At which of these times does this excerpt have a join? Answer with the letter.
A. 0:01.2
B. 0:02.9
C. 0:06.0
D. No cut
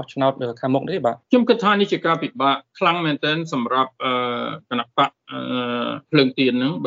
A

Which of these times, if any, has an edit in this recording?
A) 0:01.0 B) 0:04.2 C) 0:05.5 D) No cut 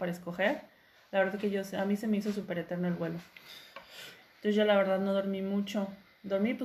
B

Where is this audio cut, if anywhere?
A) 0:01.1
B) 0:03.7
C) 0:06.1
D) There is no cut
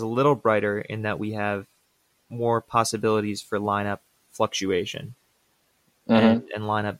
D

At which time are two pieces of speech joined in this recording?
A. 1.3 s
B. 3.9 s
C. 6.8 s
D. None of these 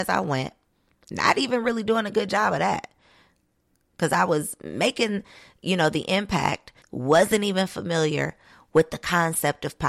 C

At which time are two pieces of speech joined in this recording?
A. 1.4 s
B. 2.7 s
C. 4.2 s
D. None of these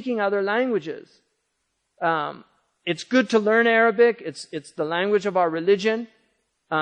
D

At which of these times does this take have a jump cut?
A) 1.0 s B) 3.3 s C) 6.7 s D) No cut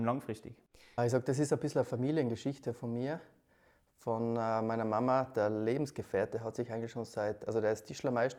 A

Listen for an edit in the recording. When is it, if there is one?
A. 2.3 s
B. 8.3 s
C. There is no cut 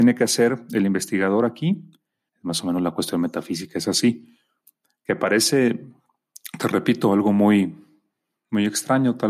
A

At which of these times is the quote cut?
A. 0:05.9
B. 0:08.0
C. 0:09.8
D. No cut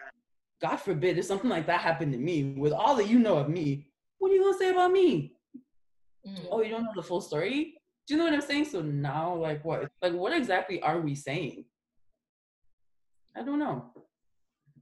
C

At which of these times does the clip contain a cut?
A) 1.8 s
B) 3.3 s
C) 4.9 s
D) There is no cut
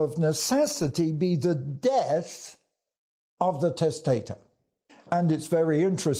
C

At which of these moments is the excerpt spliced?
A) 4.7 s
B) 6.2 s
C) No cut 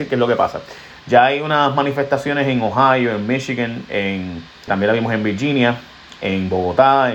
A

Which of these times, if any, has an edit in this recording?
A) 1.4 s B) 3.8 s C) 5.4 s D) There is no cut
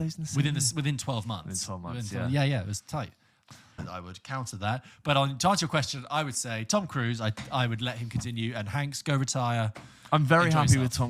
B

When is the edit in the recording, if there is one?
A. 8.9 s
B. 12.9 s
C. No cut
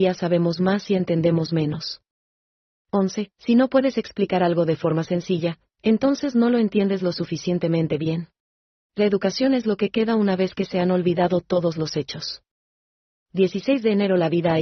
A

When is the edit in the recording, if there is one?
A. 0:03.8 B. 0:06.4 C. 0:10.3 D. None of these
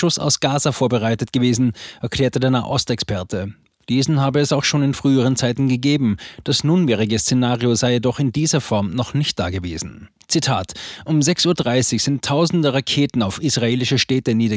D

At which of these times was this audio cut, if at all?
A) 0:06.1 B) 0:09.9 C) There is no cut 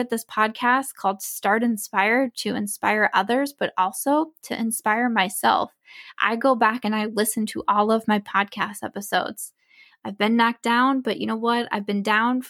B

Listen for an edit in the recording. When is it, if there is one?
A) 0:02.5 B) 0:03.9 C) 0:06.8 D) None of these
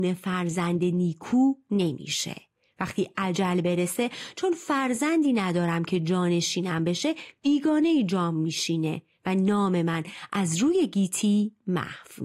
D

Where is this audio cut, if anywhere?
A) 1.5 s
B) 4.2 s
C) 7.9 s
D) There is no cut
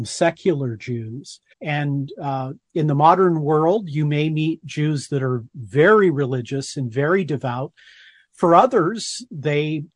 A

